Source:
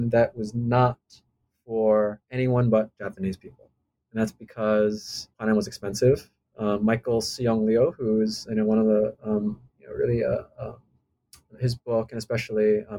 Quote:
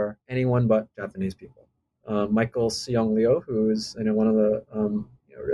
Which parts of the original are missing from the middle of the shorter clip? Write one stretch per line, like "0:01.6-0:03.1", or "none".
0:03.9-0:06.4